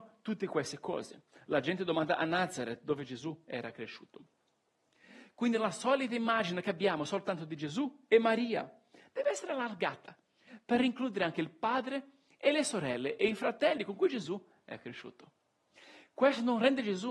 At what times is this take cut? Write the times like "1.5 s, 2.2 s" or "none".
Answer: none